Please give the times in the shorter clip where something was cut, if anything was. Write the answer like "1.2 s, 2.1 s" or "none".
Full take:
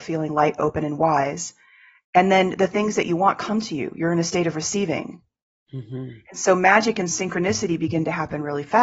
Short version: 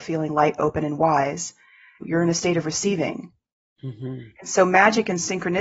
2.0 s